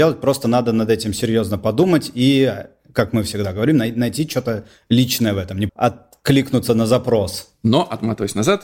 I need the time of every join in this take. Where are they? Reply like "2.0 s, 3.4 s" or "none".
5.7 s